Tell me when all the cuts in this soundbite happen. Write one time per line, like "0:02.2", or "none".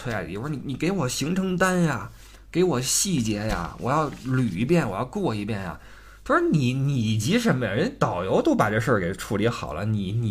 none